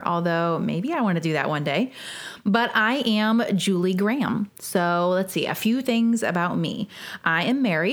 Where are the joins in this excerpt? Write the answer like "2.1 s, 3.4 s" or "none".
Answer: none